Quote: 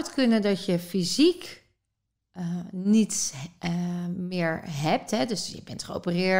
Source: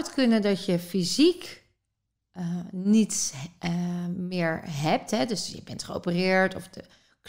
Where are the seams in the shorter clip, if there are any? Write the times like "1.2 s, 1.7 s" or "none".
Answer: none